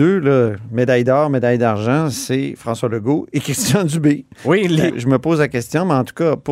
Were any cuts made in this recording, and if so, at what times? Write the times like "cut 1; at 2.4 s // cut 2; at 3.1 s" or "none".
cut 1; at 4.9 s